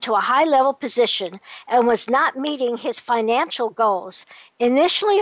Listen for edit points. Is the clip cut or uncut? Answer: uncut